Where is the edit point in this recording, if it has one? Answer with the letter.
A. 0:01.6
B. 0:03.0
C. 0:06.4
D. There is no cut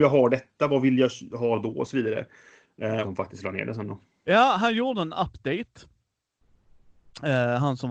B